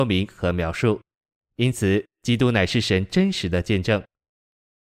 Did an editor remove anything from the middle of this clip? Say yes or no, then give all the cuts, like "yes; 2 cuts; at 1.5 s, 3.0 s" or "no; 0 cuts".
no; 0 cuts